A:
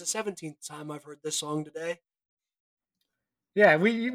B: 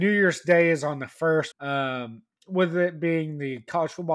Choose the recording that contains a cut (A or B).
B